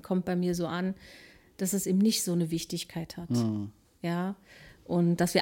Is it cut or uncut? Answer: uncut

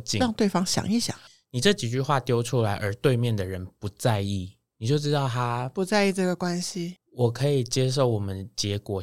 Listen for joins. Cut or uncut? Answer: cut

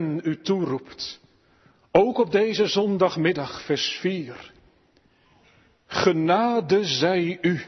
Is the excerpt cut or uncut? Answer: uncut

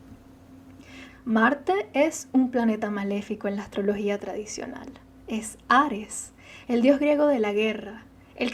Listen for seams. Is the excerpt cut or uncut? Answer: cut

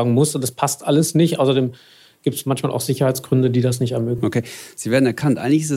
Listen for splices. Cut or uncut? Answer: uncut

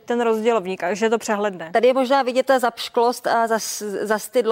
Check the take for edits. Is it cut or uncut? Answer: uncut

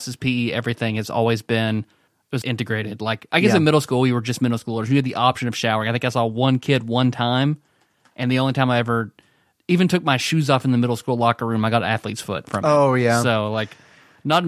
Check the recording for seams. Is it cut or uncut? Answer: cut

